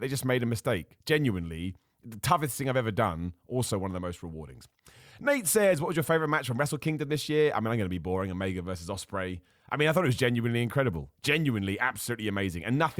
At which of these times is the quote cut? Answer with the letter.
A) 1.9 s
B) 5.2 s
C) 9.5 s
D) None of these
D